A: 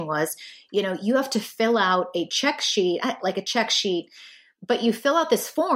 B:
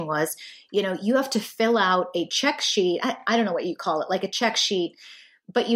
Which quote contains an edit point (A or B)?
A